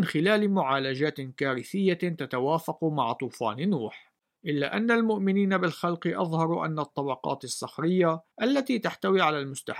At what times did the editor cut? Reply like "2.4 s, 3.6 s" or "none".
4.4 s, 8.3 s